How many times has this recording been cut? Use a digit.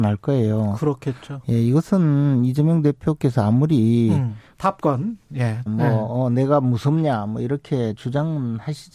2